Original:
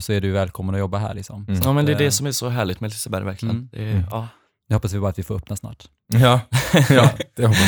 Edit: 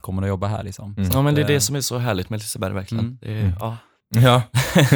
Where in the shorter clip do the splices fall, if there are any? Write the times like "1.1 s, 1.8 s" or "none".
4.0 s